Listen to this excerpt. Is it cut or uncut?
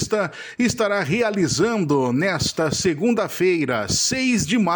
uncut